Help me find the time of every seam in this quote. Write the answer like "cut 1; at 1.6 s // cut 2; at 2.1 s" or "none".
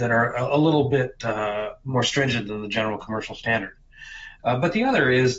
cut 1; at 4.4 s